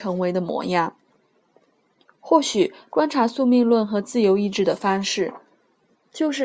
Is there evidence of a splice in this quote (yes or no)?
no